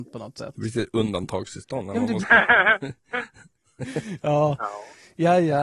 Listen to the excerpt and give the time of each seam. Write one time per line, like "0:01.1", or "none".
0:02.2

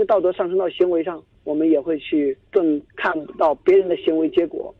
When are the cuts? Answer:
none

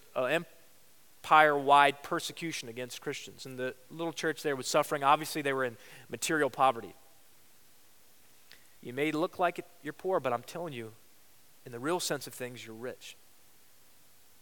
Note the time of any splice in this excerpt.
0:08.8

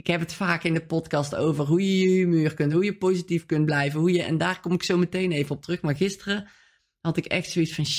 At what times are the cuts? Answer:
none

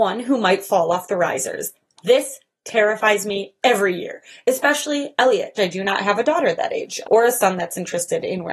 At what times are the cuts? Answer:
0:05.6
0:07.0

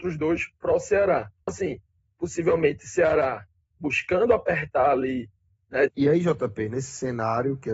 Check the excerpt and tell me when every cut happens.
0:01.5
0:05.9

